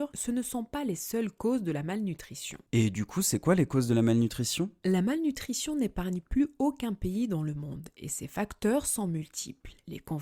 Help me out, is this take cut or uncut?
uncut